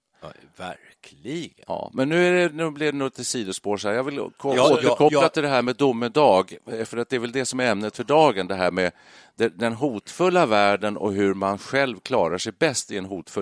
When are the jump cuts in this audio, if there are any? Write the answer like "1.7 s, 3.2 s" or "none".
none